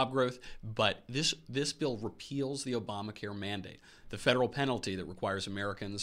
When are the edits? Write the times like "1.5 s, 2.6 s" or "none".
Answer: none